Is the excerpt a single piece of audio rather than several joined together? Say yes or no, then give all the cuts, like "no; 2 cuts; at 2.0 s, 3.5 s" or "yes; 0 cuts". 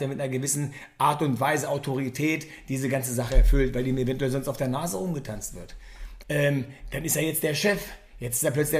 no; 1 cut; at 6.2 s